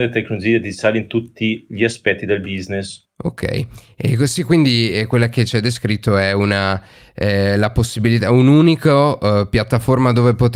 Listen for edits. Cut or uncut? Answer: cut